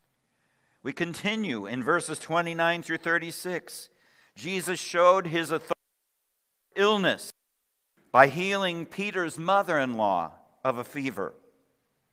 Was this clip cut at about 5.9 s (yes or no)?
no